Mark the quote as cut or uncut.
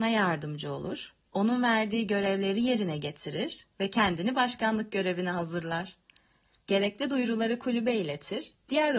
cut